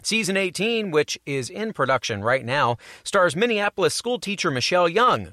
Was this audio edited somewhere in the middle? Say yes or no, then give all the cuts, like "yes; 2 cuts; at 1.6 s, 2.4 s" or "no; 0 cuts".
no; 0 cuts